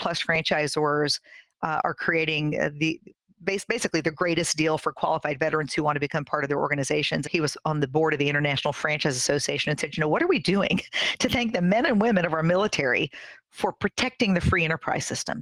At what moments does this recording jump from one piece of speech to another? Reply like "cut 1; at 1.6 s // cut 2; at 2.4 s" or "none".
cut 1; at 7.2 s